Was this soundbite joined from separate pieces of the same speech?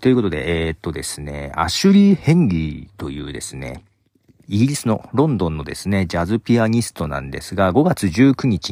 no; 0 cuts

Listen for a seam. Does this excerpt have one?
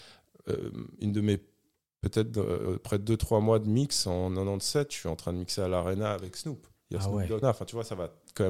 yes; 1 cut; at 7.4 s

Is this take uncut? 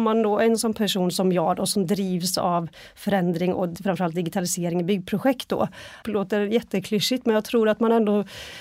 no; 1 cut; at 6.0 s

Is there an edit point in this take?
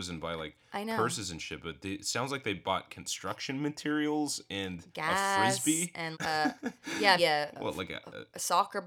yes; 2 cuts; at 6.1 s, 7.2 s

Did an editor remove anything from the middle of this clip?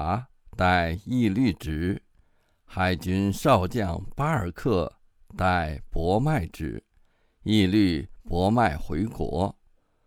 no; 0 cuts

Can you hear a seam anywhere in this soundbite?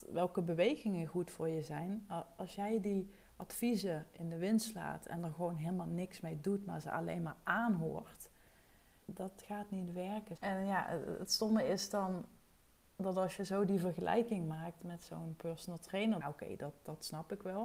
yes; 3 cuts; at 9.0 s, 10.4 s, 16.2 s

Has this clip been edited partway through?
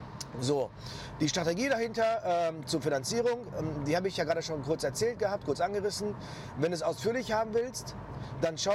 no; 0 cuts

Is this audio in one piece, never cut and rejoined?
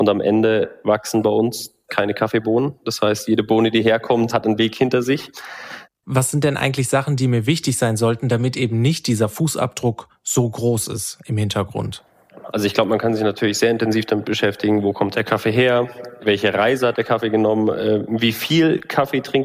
no; 1 cut; at 6.0 s

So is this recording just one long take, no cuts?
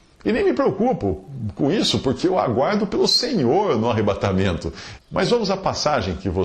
no; 1 cut; at 5.0 s

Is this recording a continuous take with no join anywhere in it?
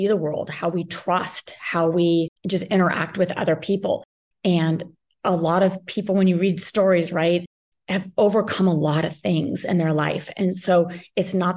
yes; 0 cuts

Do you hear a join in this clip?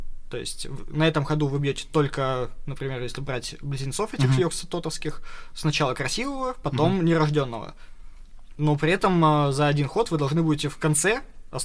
no; 0 cuts

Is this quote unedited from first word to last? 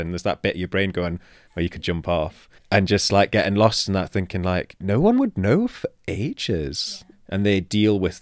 no; 2 cuts; at 2.6 s, 7.1 s

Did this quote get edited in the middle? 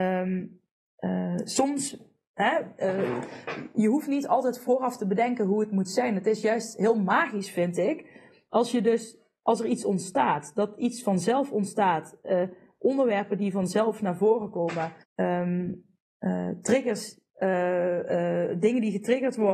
yes; 1 cut; at 15.0 s

